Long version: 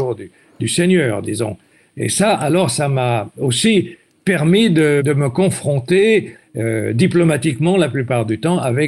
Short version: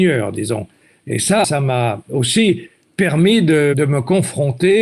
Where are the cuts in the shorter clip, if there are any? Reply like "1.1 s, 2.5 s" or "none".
1.4 s